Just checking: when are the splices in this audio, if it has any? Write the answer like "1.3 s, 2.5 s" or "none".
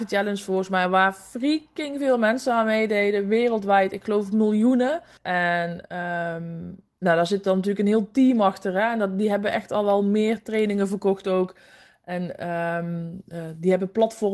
5.2 s

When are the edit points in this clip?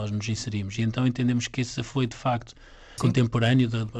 3.0 s

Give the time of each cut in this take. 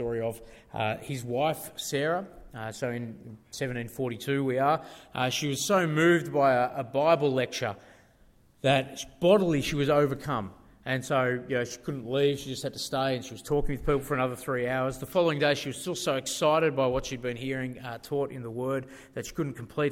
none

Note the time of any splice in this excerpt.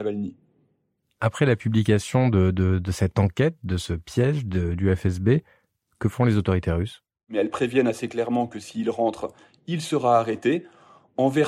none

